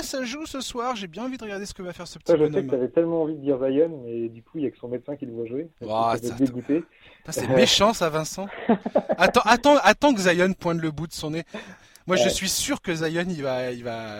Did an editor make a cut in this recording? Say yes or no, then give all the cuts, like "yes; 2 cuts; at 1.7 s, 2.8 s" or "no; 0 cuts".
no; 0 cuts